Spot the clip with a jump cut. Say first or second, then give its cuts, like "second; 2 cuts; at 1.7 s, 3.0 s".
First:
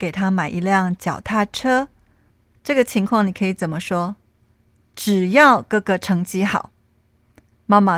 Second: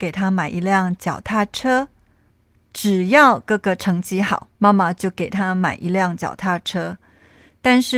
second; 2 cuts; at 2.6 s, 4.5 s